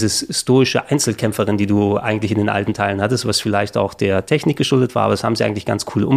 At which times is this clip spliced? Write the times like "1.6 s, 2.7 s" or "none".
none